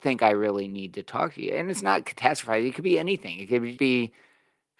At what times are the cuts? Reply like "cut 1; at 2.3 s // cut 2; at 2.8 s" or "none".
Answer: cut 1; at 3.8 s